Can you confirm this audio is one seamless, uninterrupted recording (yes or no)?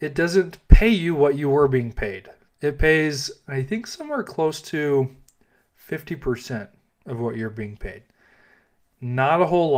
yes